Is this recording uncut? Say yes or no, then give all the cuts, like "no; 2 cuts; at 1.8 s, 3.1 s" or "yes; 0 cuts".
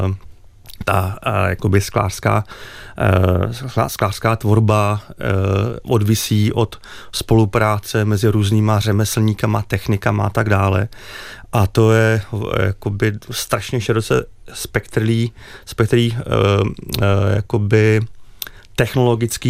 yes; 0 cuts